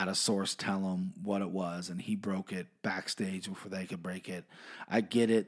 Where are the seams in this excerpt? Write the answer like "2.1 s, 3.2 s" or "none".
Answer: none